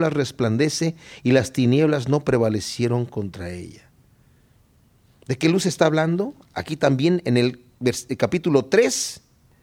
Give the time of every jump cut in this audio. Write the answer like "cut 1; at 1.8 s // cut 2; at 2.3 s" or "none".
none